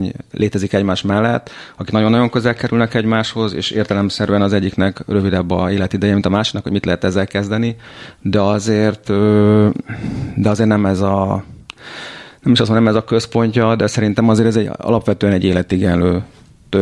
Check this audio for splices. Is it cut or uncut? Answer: uncut